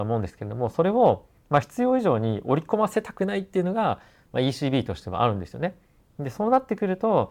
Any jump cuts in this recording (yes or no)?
no